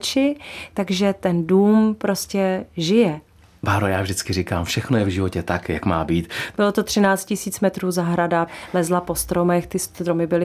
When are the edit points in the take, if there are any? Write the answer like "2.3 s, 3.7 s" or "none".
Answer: 6.5 s, 8.5 s